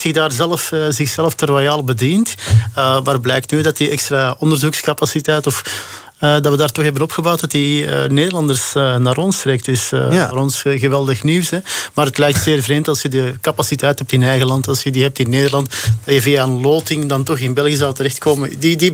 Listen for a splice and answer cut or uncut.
uncut